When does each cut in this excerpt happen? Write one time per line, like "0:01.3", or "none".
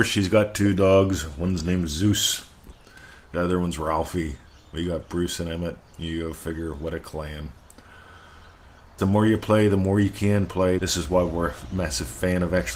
0:09.0
0:10.8